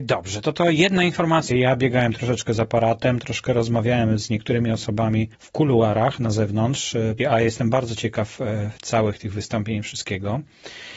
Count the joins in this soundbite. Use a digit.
3